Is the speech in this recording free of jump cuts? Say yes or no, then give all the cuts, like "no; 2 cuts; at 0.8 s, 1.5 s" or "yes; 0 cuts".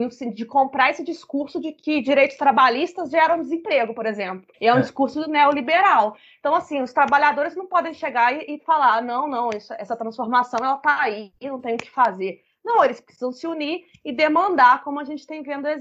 no; 1 cut; at 4.5 s